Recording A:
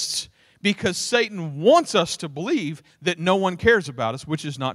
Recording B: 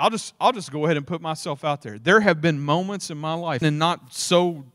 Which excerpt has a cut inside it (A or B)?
B